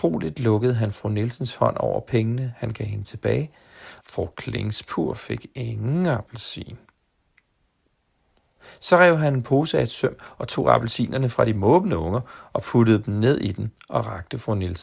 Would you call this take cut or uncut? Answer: cut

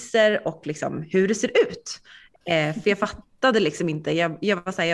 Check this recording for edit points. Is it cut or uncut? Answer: cut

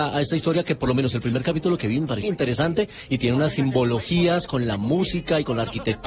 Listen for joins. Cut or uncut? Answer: cut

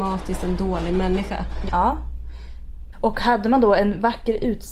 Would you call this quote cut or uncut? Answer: cut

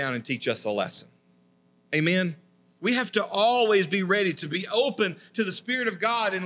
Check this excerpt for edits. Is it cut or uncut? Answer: cut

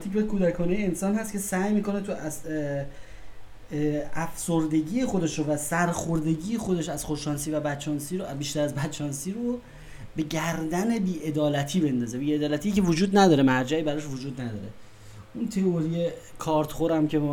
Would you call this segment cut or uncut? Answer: cut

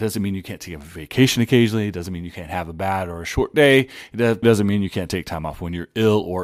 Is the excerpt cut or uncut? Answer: cut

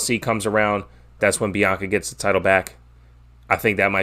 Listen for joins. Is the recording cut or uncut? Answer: cut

